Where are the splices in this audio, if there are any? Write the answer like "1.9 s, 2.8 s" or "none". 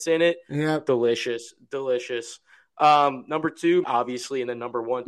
3.8 s